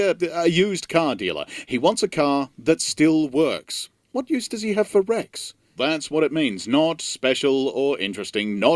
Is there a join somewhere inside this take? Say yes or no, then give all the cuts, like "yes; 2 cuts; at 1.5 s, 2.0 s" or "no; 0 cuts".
yes; 1 cut; at 5.8 s